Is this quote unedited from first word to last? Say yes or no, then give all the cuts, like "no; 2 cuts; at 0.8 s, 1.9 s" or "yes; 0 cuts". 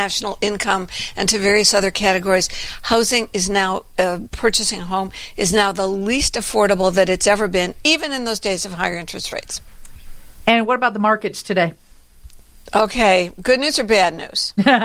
yes; 0 cuts